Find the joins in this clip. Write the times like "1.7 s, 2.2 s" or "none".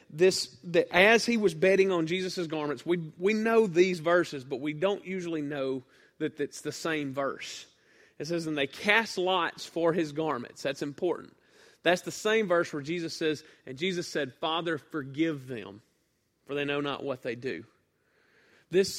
none